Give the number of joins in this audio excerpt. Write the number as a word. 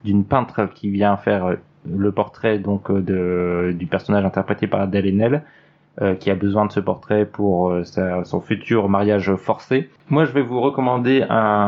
one